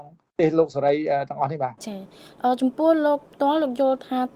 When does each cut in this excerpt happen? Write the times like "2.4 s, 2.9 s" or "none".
1.8 s